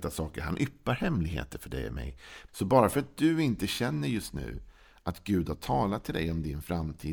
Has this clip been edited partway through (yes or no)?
yes